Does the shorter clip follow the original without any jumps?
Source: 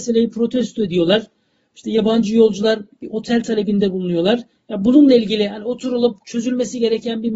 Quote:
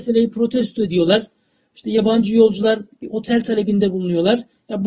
yes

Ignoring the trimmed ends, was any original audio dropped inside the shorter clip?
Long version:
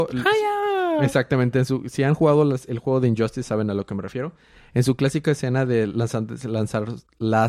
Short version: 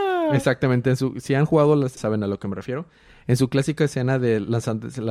yes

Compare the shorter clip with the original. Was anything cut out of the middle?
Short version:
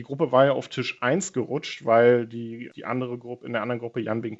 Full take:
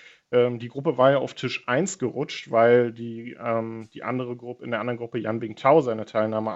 yes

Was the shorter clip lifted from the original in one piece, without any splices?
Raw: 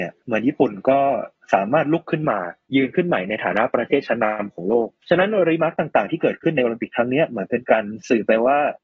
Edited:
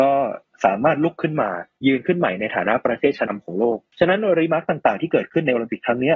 no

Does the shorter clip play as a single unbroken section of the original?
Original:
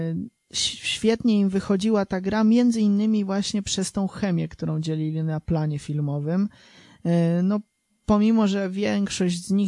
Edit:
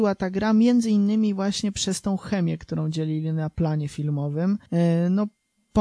no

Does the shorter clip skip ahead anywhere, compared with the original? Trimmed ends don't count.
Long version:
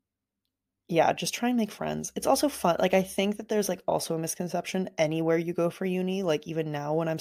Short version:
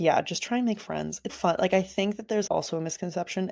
yes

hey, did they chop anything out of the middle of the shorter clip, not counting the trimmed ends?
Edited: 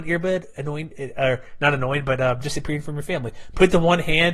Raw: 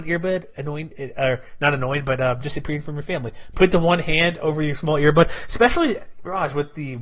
no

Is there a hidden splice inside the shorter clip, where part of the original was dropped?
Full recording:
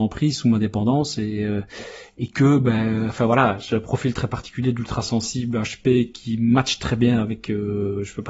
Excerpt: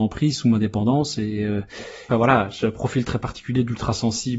yes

